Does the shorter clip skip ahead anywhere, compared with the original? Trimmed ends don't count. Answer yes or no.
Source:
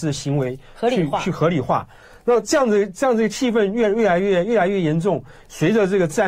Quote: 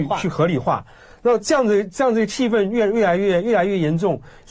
no